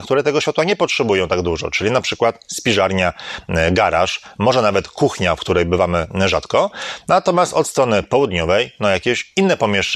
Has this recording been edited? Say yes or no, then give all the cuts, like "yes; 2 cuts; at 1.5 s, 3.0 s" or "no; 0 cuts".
no; 0 cuts